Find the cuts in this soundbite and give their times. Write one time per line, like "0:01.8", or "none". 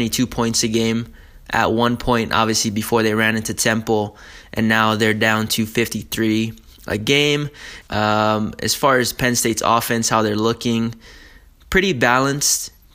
0:07.8